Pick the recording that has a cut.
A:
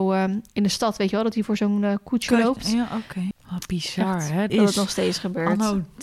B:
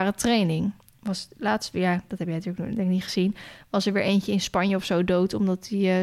A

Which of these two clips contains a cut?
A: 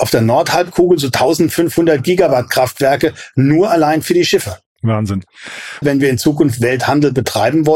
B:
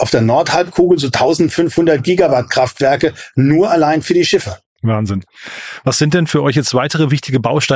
A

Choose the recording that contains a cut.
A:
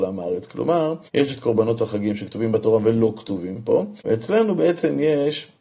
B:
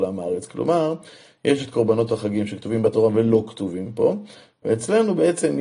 A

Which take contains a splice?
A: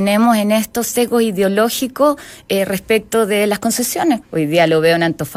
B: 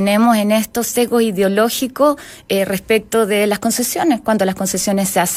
A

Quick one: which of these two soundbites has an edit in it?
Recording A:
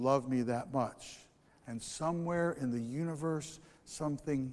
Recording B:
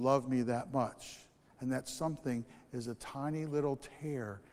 B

